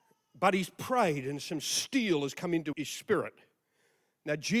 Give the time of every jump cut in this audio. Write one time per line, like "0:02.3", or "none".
0:02.7